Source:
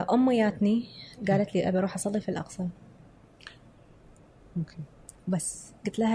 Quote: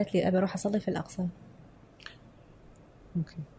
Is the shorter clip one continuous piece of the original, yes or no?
yes